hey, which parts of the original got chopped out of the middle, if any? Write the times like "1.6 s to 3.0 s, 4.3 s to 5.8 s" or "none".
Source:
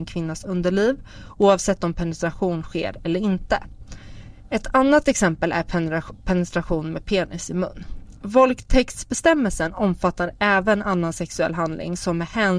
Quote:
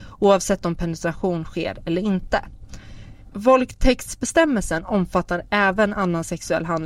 4.5 s to 8.2 s